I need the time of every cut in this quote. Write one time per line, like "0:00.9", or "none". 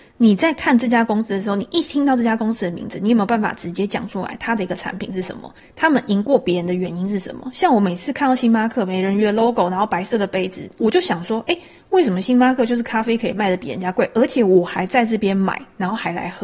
none